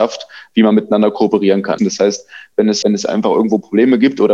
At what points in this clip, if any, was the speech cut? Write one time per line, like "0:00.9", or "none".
0:01.8
0:02.8